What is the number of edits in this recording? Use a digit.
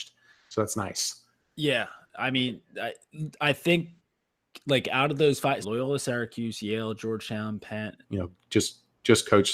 2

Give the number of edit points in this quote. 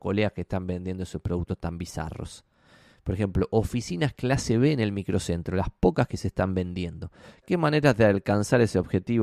1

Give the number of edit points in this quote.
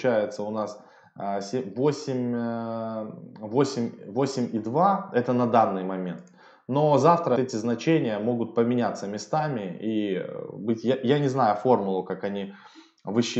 1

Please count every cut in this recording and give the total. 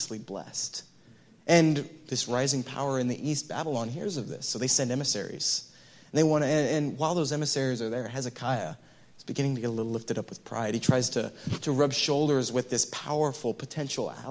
0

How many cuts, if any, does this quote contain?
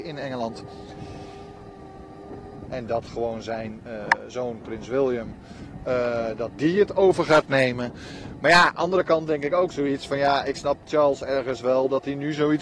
1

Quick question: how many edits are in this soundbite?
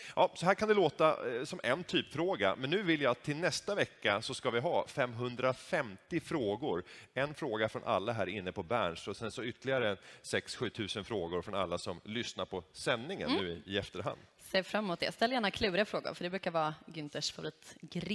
0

